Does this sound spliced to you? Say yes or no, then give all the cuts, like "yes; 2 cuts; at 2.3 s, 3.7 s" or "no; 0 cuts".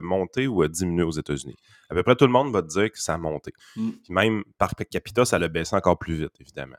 yes; 1 cut; at 3.6 s